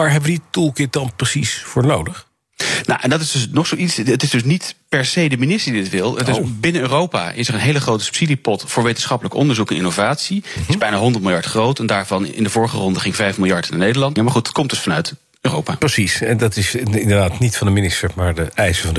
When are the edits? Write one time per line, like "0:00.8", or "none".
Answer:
0:14.2